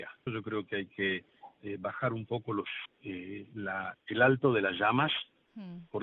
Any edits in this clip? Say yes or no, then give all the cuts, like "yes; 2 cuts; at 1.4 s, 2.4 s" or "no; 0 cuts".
yes; 2 cuts; at 2.9 s, 3.9 s